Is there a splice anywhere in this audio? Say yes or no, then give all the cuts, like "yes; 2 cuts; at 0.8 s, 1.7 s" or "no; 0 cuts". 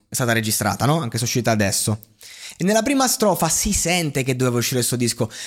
no; 0 cuts